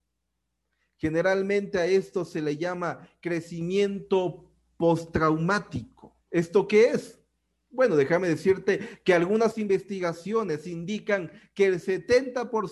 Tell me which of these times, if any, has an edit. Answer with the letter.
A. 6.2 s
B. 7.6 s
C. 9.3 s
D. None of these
A